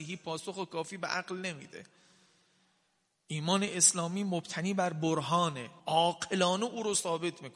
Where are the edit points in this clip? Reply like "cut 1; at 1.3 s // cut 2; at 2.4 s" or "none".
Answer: cut 1; at 5.8 s